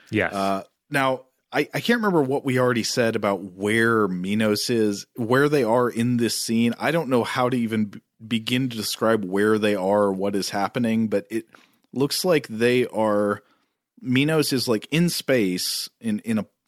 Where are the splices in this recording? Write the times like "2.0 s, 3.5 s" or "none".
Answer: none